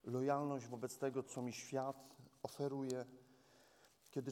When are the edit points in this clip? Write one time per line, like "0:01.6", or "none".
0:01.3